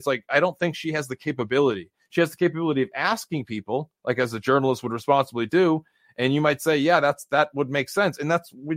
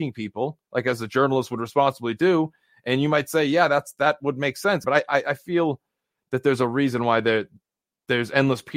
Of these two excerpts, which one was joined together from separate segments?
second; 1 cut; at 4.8 s

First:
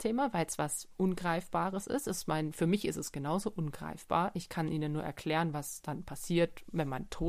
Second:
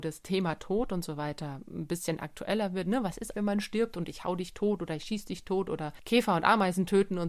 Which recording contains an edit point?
second; 1 cut; at 3.3 s

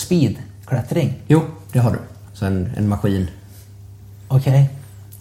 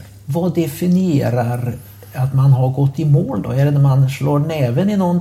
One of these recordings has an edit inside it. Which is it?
first; 1 cut; at 2.3 s

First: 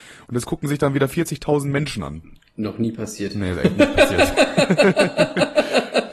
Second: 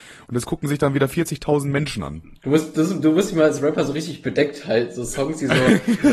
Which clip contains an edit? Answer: second; 1 cut; at 2.4 s

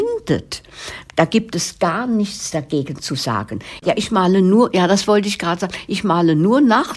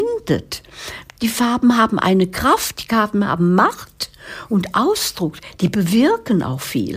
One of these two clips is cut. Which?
first; 2 cuts; at 1.1 s, 3.8 s

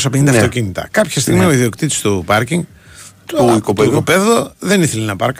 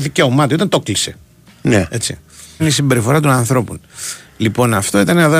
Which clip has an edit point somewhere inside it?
second; 1 cut; at 2.6 s

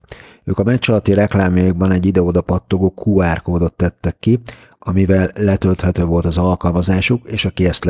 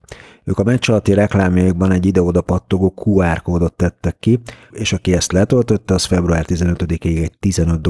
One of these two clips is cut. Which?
second; 1 cut; at 4.7 s

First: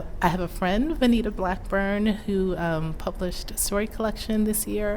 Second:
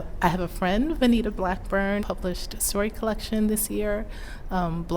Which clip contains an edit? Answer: second; 1 cut; at 2.0 s

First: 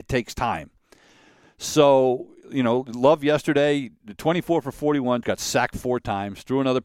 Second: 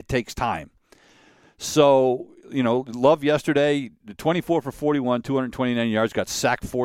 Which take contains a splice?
first; 1 cut; at 5.2 s

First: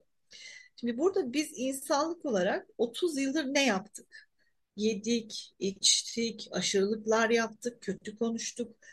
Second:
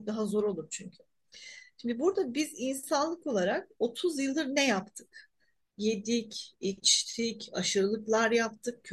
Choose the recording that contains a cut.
first; 1 cut; at 7.8 s

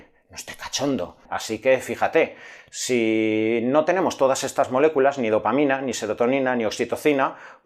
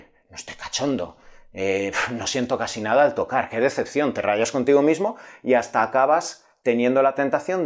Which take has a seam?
first; 1 cut; at 1.3 s

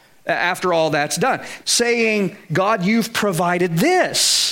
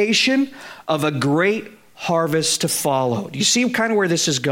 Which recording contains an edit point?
first; 1 cut; at 1.6 s

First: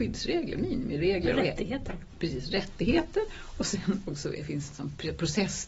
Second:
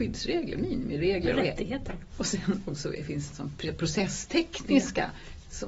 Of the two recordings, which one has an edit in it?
second; 1 cut; at 2.1 s

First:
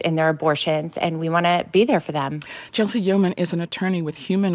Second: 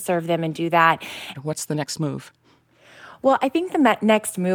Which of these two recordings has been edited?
second; 1 cut; at 1.3 s

